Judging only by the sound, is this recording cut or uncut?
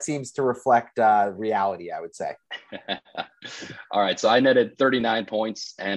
uncut